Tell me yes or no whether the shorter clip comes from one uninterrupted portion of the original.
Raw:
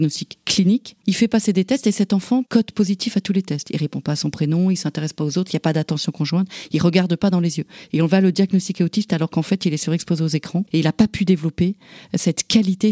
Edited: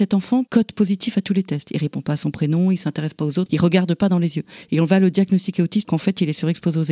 no